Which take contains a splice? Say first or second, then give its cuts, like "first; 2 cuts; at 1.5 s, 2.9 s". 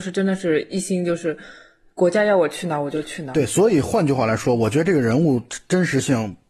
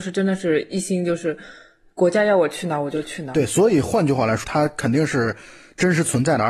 second; 1 cut; at 4.4 s